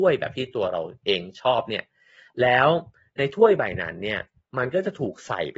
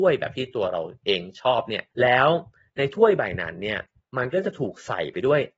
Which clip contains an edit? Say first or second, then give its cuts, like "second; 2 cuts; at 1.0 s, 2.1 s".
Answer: second; 1 cut; at 1.9 s